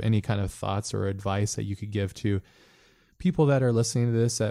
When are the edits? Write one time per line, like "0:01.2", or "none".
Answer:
none